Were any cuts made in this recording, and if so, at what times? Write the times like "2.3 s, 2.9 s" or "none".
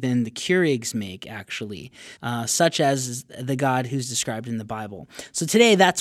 2.2 s